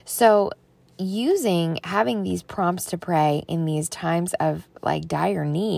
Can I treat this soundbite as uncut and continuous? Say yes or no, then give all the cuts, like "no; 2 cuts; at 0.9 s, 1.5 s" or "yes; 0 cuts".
yes; 0 cuts